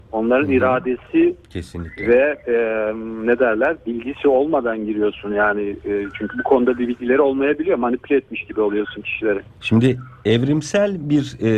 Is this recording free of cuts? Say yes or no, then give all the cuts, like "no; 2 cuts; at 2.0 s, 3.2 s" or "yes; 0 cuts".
no; 1 cut; at 9.5 s